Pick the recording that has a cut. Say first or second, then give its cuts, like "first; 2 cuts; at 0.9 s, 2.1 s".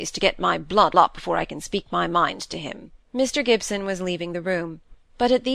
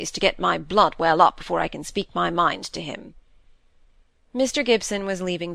first; 2 cuts; at 0.9 s, 3.0 s